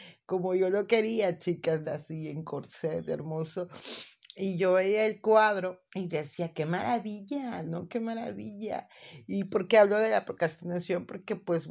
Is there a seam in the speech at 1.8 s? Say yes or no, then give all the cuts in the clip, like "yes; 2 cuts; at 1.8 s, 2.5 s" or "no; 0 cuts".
yes; 2 cuts; at 1.8 s, 5.9 s